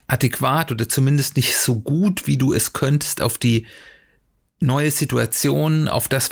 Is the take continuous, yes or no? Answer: yes